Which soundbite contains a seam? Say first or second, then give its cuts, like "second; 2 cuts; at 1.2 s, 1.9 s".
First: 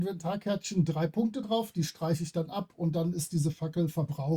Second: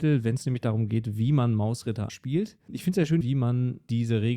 second; 2 cuts; at 2.1 s, 3.2 s